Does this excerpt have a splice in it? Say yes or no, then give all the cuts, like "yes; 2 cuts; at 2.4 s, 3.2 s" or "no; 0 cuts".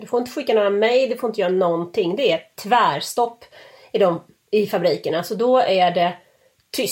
no; 0 cuts